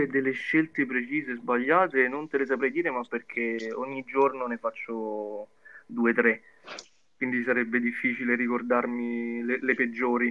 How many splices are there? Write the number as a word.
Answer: zero